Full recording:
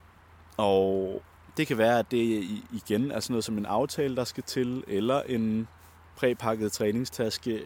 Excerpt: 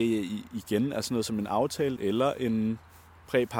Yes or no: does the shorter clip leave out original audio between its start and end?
yes